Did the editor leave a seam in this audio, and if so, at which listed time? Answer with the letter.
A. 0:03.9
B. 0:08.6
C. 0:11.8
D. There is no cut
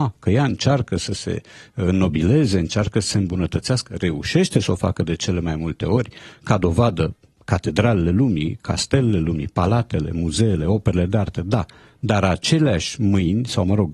D